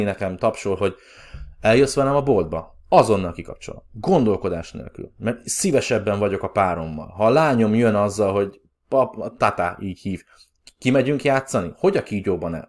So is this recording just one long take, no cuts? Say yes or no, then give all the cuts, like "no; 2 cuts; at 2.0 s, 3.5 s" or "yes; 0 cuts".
yes; 0 cuts